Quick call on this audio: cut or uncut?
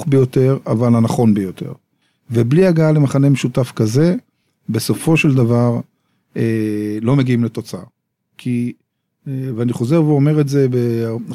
uncut